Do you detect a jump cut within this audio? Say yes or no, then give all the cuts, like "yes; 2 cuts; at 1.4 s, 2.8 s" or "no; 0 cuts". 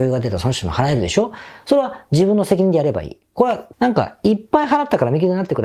yes; 1 cut; at 3.7 s